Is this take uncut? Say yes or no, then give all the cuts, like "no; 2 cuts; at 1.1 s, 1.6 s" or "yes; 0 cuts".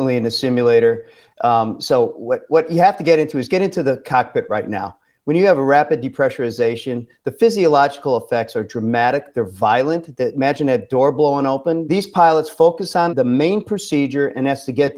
no; 2 cuts; at 11.8 s, 13.1 s